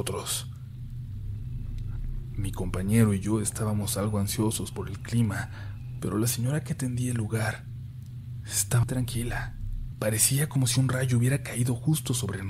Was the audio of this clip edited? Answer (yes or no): yes